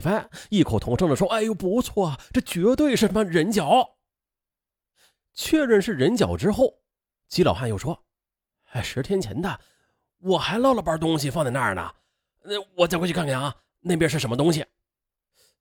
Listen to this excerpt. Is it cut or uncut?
uncut